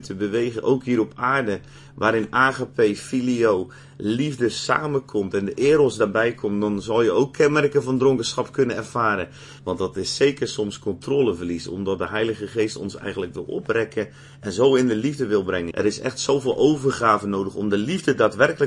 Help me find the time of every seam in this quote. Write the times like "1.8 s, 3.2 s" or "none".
9.6 s, 15.7 s